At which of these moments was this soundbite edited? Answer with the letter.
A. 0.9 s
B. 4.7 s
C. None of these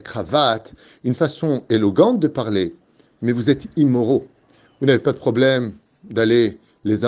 C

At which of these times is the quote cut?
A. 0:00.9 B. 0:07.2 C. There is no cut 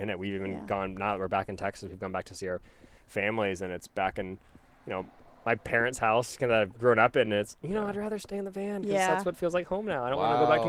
C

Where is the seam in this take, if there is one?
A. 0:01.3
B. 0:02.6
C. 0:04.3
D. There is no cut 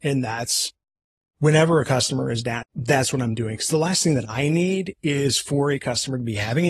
B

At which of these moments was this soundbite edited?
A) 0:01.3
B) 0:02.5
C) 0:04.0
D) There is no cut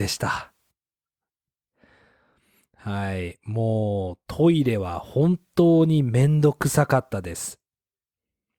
D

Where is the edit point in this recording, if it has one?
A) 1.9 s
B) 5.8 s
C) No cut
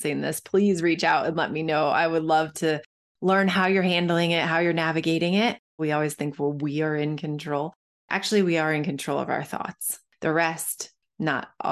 B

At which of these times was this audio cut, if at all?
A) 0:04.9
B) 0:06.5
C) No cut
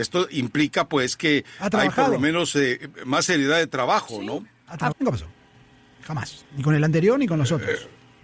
A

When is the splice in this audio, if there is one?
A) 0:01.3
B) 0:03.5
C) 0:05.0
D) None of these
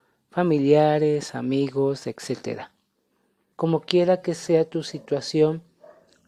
B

